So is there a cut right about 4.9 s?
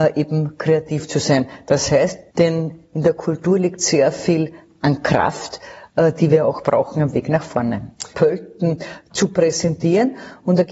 no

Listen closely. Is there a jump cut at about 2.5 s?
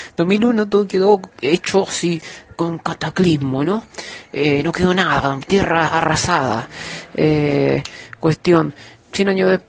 yes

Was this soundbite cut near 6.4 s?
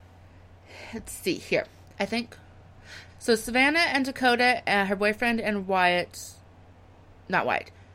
no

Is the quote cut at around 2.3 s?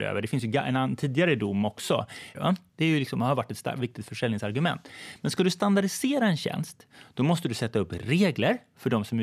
yes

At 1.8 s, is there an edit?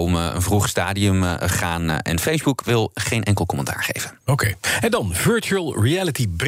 no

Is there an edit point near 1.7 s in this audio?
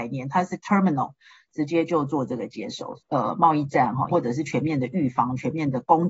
no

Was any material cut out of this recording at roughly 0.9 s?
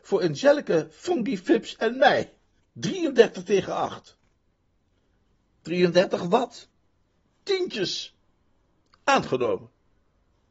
no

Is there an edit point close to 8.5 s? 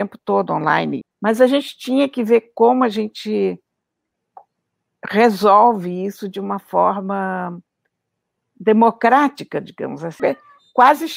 no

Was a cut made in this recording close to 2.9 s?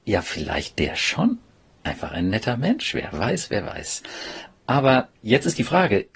no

